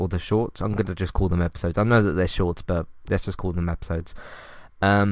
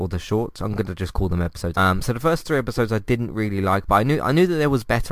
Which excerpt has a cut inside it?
second; 1 cut; at 1.7 s

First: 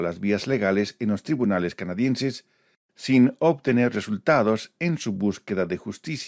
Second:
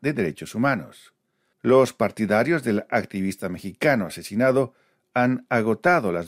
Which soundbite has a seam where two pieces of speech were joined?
second; 1 cut; at 1.5 s

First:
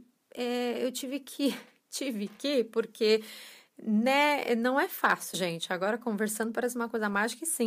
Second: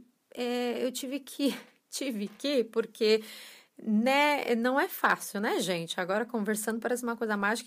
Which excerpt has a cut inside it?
first; 1 cut; at 5.3 s

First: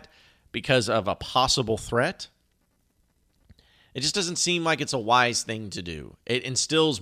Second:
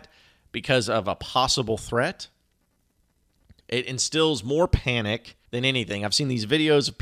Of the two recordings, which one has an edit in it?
second; 2 cuts; at 3.6 s, 5.5 s

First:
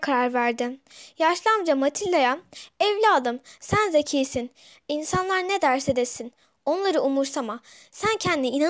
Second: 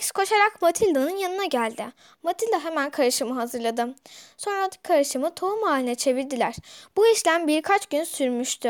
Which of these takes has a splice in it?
second; 1 cut; at 2.1 s

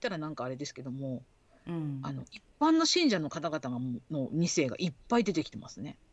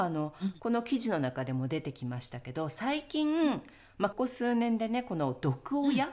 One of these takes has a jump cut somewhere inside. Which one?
second; 1 cut; at 4.1 s

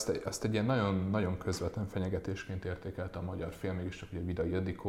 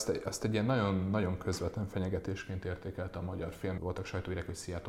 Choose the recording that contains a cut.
second; 1 cut; at 3.8 s

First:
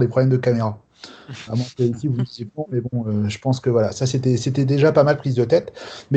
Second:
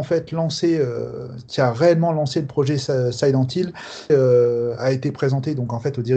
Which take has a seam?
second; 1 cut; at 4.1 s

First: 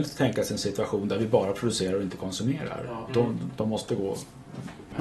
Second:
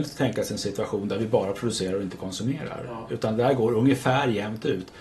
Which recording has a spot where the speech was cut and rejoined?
first; 1 cut; at 3.1 s

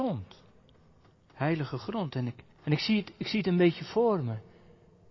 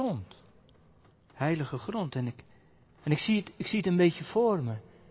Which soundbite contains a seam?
first; 1 cut; at 2.5 s

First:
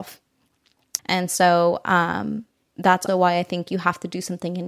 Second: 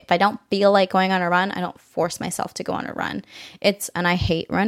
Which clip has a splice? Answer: first; 2 cuts; at 1.0 s, 3.1 s

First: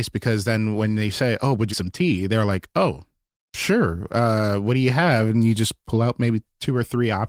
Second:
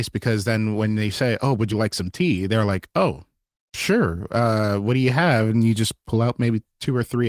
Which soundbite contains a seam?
first; 1 cut; at 1.7 s

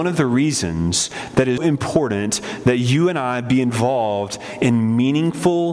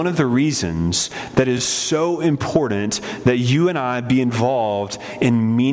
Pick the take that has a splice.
first; 1 cut; at 1.6 s

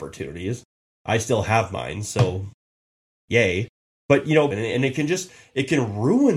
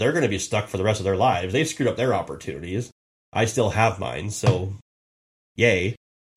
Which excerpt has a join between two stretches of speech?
first; 1 cut; at 4.5 s

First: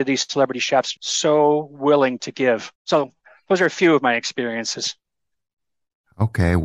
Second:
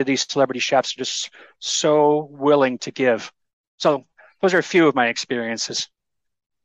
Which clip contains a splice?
first; 2 cuts; at 1.0 s, 2.8 s

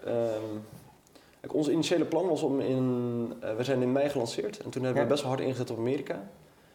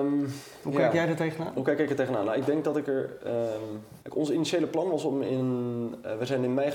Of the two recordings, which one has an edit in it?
second; 1 cut; at 4.0 s

